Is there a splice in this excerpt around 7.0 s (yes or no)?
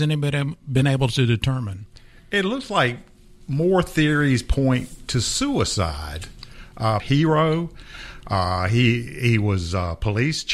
yes